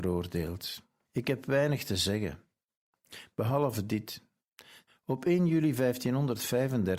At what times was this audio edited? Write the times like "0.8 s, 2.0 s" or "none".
1.0 s, 4.9 s